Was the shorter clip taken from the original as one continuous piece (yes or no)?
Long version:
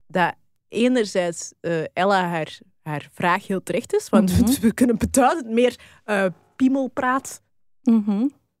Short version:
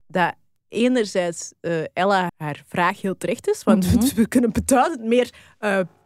no